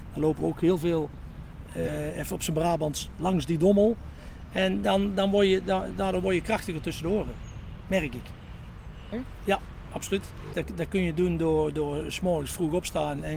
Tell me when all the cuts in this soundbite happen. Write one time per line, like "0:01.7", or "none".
0:09.1
0:10.5